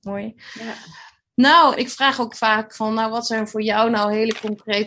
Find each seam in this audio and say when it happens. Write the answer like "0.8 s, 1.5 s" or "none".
1.8 s

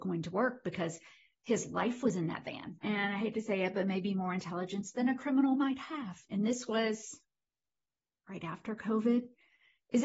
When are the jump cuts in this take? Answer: 2.8 s, 6.3 s

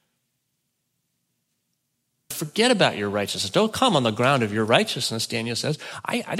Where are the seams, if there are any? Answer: 2.3 s

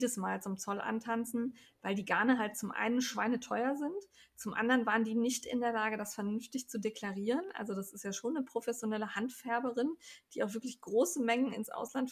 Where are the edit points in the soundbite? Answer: none

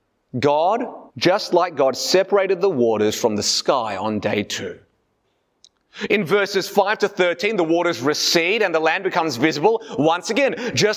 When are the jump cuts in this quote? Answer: 1.1 s

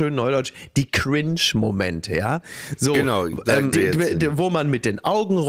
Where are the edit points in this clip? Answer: 3.7 s

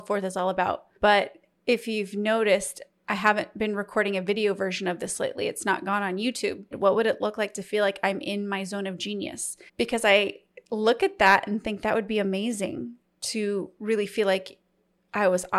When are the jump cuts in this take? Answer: 6.7 s, 9.7 s

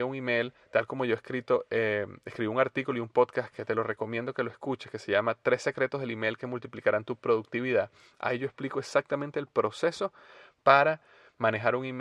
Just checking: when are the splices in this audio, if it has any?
none

